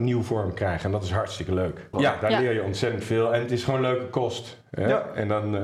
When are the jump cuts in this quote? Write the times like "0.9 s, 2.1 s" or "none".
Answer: 1.9 s

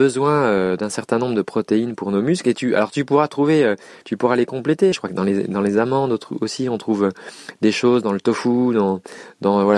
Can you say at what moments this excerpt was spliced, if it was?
4.9 s

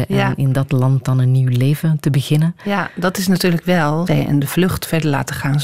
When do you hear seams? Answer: 4.1 s

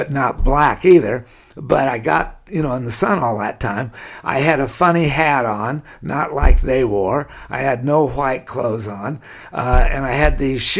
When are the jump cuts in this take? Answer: none

